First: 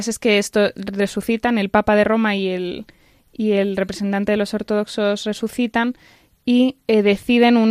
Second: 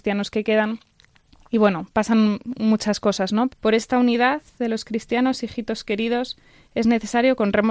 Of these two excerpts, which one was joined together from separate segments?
second; 1 cut; at 3.5 s

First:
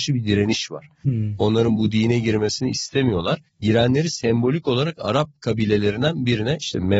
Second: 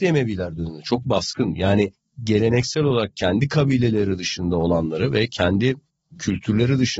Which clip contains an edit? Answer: first; 1 cut; at 3.5 s

